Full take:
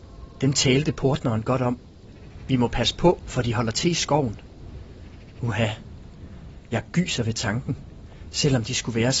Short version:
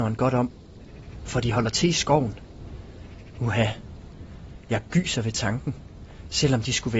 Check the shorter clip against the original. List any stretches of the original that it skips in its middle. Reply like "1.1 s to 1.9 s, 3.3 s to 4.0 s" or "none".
2.5 s to 3.2 s